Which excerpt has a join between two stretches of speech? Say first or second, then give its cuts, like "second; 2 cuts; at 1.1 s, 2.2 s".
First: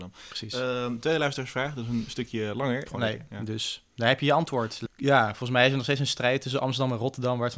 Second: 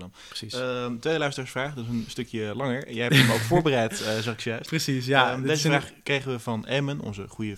first; 2 cuts; at 2.9 s, 4.8 s